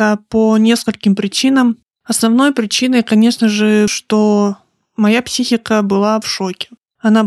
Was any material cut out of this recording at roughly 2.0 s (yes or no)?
no